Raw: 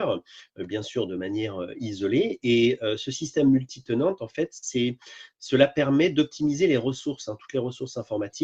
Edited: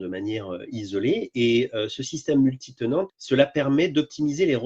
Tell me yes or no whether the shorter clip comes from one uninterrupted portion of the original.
no